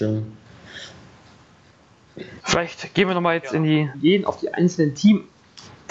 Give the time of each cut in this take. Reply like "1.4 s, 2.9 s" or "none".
2.4 s, 3.9 s